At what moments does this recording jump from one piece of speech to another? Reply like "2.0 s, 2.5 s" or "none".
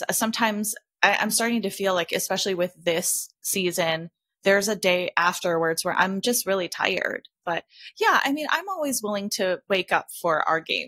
7.4 s